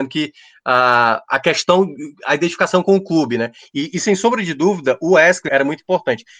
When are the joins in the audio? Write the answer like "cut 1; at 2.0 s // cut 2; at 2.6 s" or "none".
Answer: cut 1; at 5.5 s